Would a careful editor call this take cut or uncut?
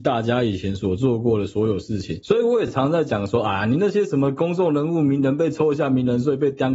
uncut